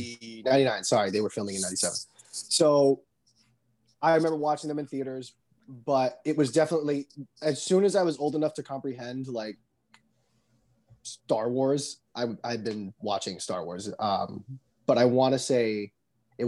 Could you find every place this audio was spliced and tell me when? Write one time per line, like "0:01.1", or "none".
none